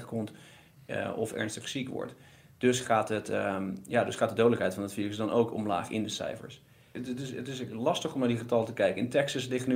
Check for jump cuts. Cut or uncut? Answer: uncut